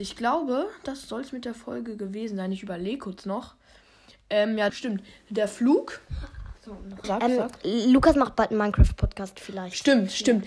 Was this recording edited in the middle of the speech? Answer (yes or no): yes